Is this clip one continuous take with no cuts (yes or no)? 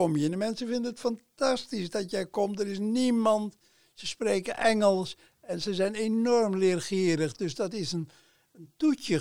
yes